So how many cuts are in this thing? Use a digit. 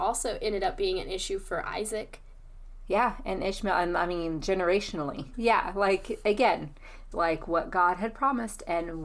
2